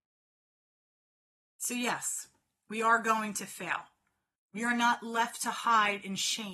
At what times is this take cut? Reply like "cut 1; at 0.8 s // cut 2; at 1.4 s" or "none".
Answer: cut 1; at 4.4 s